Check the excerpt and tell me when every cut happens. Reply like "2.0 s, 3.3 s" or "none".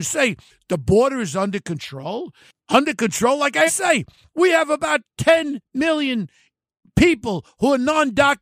3.7 s